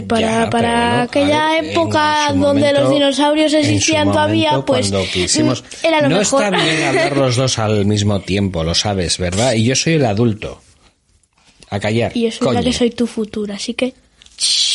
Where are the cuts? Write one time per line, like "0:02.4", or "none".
none